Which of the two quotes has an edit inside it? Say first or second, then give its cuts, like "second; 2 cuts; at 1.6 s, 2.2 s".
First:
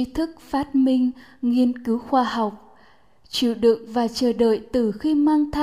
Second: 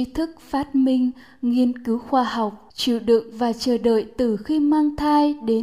second; 1 cut; at 2.7 s